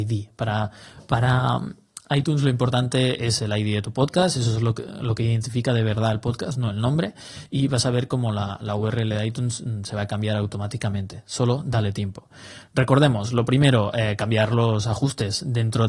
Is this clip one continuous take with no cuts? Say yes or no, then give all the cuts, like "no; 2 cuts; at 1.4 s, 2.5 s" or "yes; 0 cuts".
yes; 0 cuts